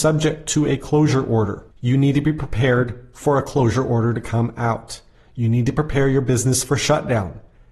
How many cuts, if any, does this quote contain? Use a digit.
1